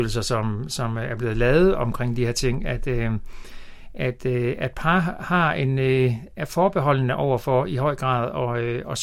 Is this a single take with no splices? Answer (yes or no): yes